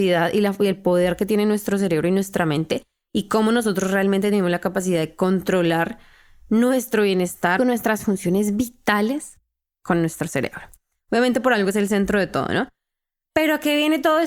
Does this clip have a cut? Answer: yes; 1 cut; at 7.6 s

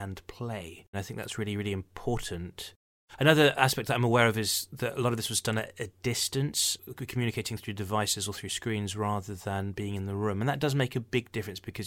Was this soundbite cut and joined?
yes; 1 cut; at 0.9 s

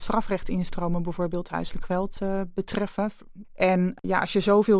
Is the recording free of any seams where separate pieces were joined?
no; 1 cut; at 3.4 s

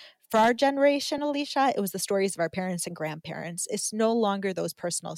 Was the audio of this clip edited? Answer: no; 0 cuts

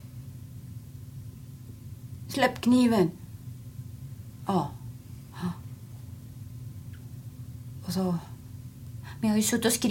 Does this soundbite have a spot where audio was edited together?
yes; 1 cut; at 9.0 s

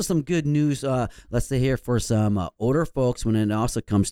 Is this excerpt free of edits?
yes; 0 cuts

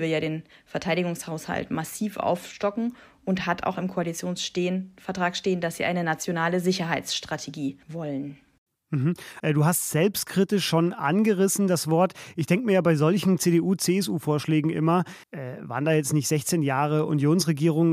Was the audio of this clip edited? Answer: yes; 3 cuts; at 7.8 s, 9.4 s, 15.2 s

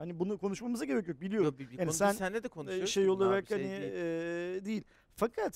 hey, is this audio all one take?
yes; 0 cuts

